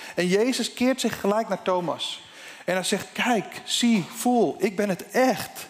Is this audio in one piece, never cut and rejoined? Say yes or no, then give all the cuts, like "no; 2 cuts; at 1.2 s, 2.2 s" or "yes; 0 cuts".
no; 1 cut; at 3.1 s